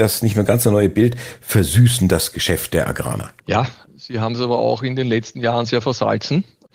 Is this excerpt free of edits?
no; 1 cut; at 3.4 s

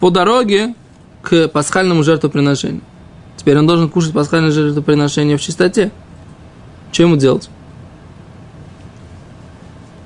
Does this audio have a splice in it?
no; 0 cuts

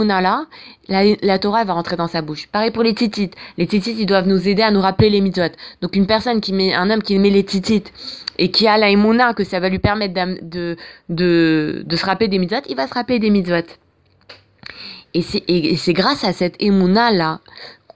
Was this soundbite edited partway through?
no; 0 cuts

